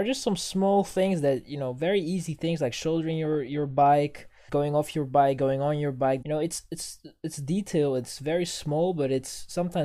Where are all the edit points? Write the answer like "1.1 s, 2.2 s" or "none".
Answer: 4.5 s, 6.2 s